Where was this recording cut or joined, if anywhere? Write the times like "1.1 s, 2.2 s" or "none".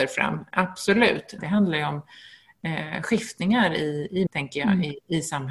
1.4 s, 4.3 s